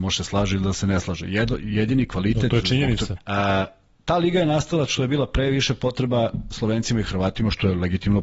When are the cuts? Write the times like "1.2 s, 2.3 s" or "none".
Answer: 3.2 s